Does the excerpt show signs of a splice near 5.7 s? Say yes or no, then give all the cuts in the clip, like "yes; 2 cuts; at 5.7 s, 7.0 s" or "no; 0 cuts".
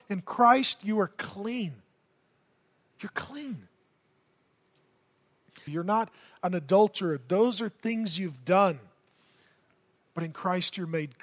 yes; 1 cut; at 5.7 s